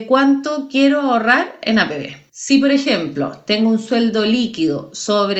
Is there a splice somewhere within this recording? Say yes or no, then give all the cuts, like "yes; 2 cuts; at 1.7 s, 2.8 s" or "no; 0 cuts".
no; 0 cuts